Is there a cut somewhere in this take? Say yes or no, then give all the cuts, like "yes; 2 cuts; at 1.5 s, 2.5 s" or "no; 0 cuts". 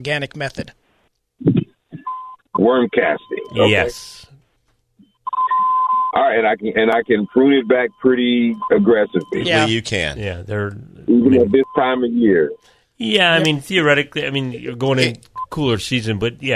yes; 2 cuts; at 2.5 s, 9.4 s